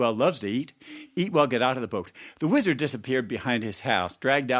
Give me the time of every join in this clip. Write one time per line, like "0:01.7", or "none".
none